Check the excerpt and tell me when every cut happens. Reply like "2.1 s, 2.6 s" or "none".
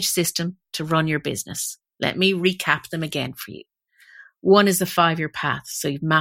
none

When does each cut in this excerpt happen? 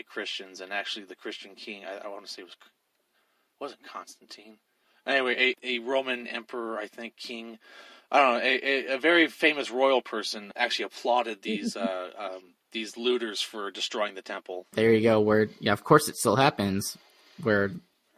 none

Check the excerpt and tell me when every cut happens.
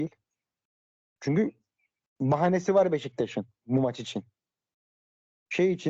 none

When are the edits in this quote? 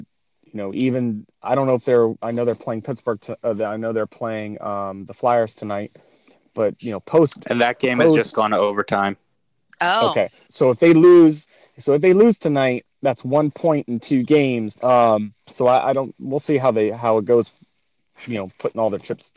10.5 s, 14.7 s

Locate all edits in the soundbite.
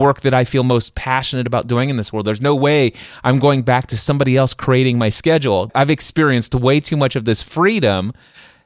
none

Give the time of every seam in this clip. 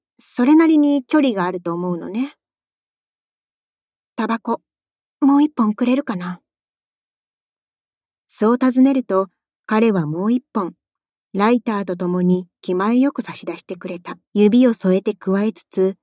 14.2 s

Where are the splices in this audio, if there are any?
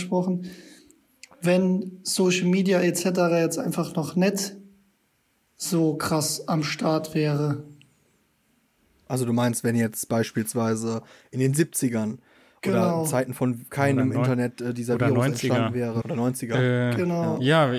16.0 s

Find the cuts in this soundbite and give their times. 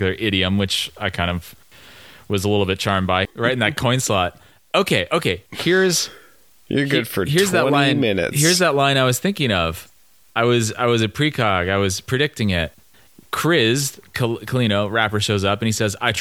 3.3 s

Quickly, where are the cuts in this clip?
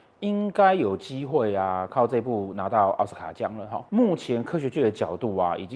3.9 s

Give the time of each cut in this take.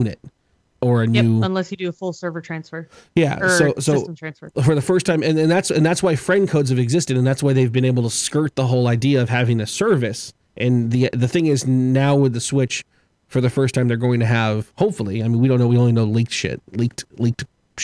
none

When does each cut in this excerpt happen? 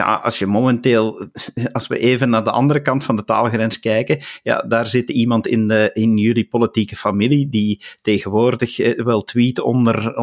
none

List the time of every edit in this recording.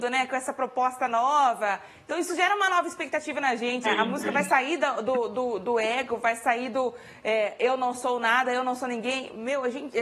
3.8 s

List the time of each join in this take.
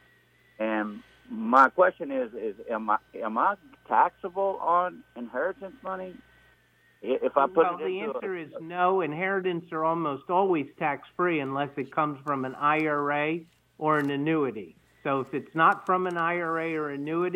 none

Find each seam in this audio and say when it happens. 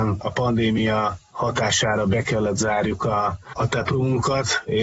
3.6 s

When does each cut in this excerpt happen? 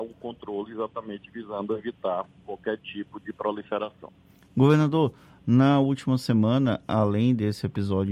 none

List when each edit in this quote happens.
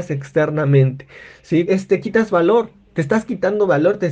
1.7 s

